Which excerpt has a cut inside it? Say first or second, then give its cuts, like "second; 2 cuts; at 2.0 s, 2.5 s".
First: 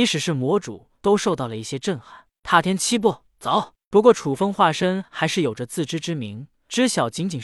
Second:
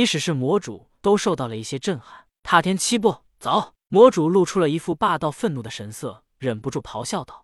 second; 1 cut; at 3.8 s